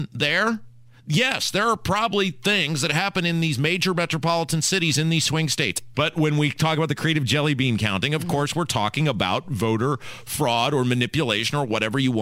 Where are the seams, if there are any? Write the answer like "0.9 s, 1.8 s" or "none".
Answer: 5.9 s